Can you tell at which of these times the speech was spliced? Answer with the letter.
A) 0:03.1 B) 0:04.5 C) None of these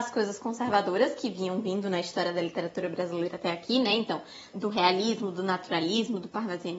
B